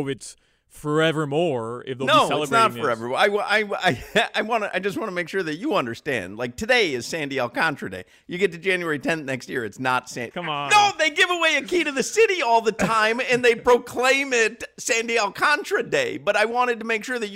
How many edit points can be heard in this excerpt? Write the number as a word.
one